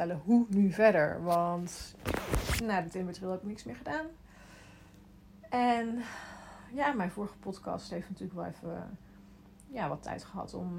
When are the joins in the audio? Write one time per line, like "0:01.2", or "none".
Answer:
none